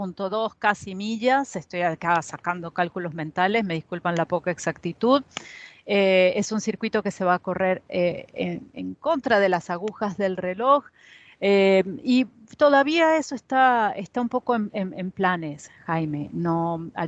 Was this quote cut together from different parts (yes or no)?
no